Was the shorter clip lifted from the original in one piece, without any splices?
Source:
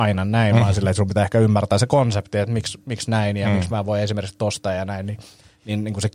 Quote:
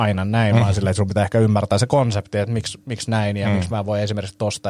yes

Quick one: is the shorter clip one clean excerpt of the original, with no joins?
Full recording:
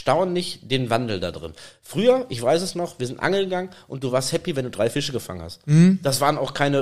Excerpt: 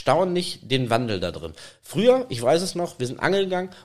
yes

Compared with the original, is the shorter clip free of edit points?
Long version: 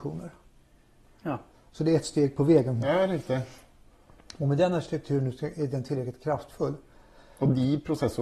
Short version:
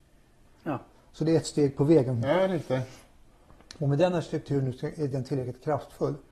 yes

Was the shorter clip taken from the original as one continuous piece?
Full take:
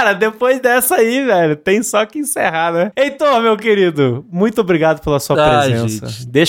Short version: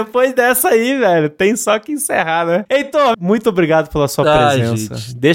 no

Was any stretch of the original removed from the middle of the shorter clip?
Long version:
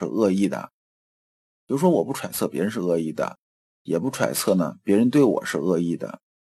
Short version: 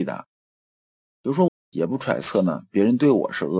yes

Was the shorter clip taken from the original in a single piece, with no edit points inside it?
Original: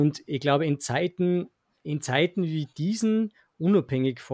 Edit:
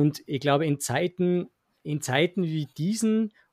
yes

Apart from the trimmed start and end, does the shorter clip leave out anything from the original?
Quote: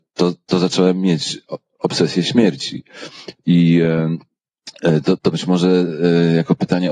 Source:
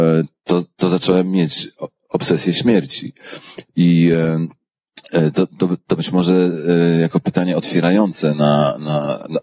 yes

